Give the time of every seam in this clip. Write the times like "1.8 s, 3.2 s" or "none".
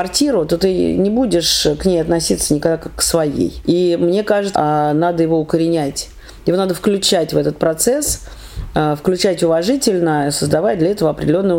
4.5 s